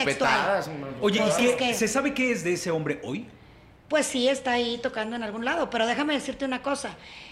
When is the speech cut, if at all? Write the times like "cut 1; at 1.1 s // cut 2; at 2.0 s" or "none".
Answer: none